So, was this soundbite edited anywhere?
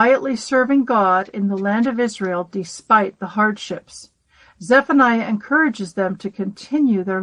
no; 0 cuts

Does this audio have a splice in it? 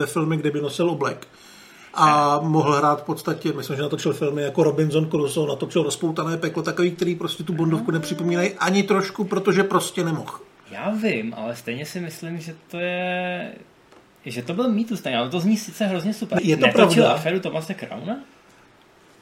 yes; 1 cut; at 16.4 s

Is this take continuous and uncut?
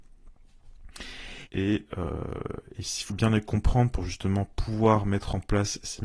no; 2 cuts; at 1.5 s, 3.1 s

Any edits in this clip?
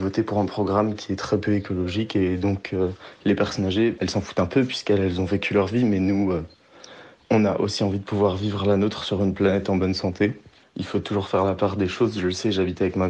yes; 1 cut; at 4.0 s

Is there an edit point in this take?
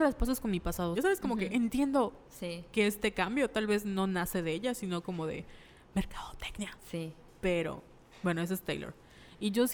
yes; 1 cut; at 0.9 s

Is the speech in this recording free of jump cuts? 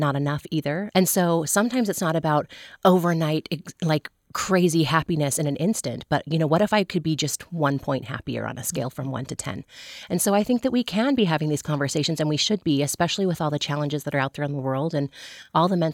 no; 1 cut; at 0.9 s

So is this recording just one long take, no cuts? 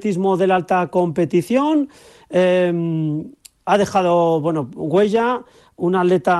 yes; 0 cuts

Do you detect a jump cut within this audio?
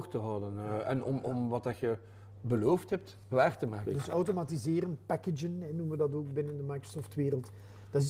yes; 2 cuts; at 2.4 s, 3.9 s

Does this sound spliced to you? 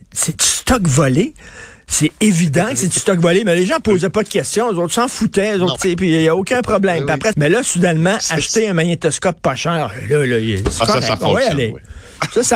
yes; 2 cuts; at 5.8 s, 7.3 s

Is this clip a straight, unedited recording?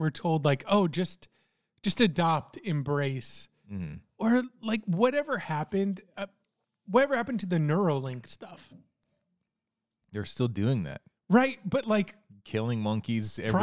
yes; 0 cuts

